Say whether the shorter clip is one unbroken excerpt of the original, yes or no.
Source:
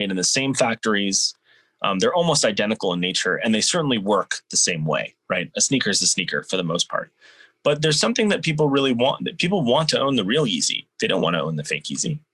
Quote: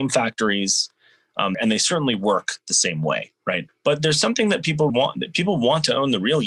no